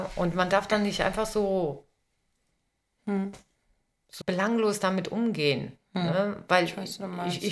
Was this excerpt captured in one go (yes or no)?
no